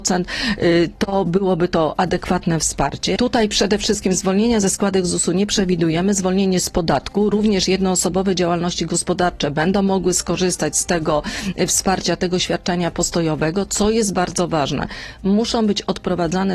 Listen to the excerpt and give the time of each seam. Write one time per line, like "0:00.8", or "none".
0:03.2